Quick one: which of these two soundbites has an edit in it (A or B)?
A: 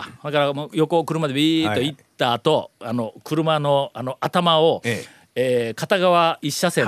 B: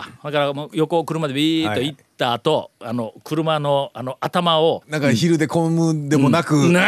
B